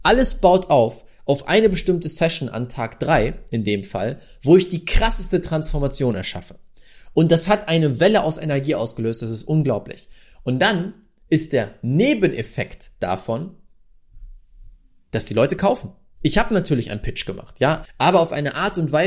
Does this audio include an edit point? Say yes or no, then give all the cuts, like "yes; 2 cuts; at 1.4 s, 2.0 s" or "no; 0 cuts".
yes; 1 cut; at 17.8 s